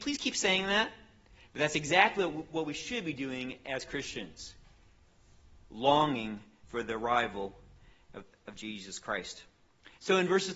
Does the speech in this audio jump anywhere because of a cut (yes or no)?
no